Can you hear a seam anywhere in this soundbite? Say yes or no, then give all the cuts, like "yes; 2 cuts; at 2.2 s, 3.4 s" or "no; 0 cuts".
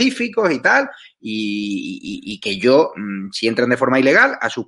no; 0 cuts